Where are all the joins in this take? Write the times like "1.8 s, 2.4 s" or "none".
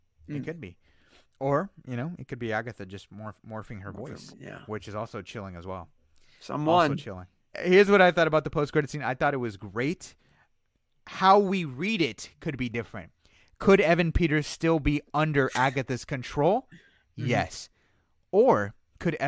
4.3 s, 7.5 s